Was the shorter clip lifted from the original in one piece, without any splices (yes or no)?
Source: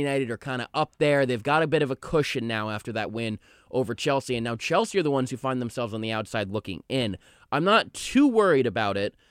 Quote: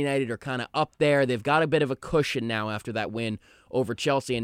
yes